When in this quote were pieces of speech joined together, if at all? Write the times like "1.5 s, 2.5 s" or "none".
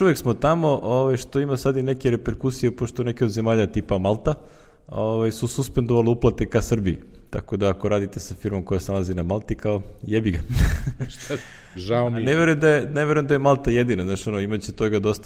none